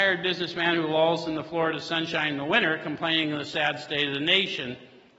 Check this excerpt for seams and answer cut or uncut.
uncut